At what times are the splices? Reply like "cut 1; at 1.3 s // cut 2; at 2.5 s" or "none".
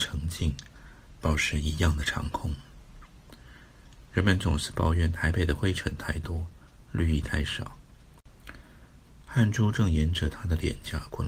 cut 1; at 4.1 s // cut 2; at 9.2 s